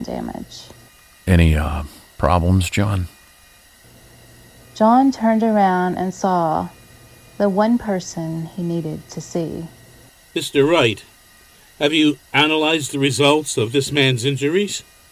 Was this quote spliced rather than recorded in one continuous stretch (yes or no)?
no